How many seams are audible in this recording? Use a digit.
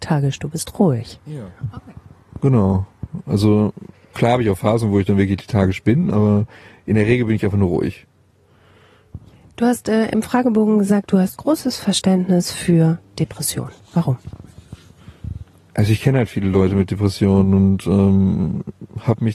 0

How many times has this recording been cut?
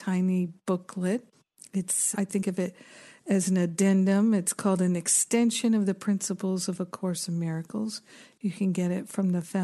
1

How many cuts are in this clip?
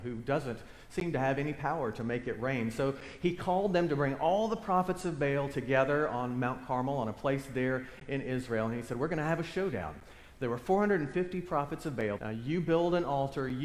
1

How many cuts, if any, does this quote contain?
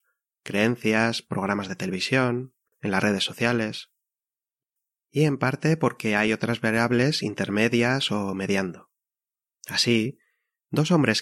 0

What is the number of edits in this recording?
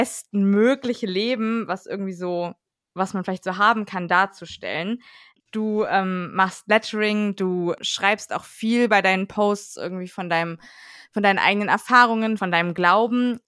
1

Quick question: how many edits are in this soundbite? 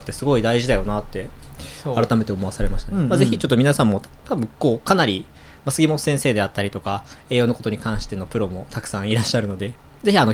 0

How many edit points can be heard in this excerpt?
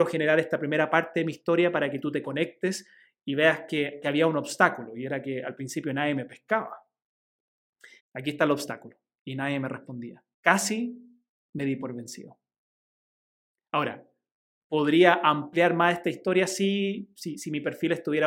2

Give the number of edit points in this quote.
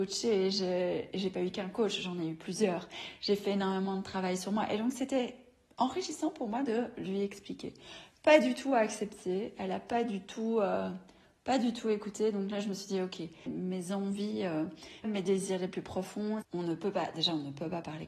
3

